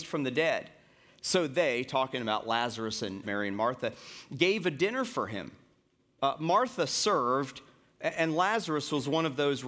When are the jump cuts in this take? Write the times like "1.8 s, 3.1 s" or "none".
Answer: 3.2 s

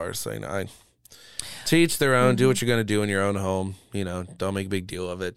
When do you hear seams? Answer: none

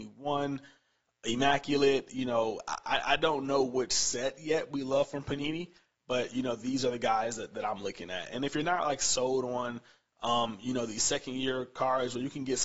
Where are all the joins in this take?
none

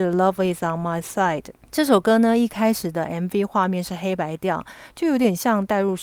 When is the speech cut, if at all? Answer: 1.6 s

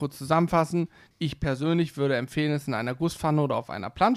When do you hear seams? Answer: 1.1 s

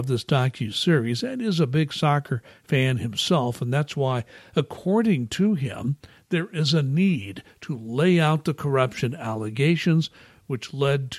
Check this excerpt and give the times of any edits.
none

